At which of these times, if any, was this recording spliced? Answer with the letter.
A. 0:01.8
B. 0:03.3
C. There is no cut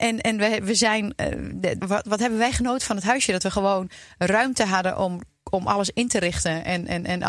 A